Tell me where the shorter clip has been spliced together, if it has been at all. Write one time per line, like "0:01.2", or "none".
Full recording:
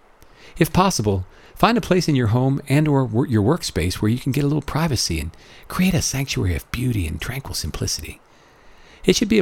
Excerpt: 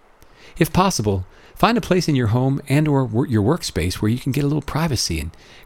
none